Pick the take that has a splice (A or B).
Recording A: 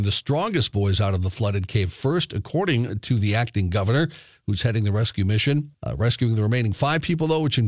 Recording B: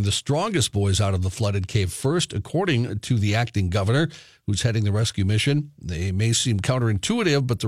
A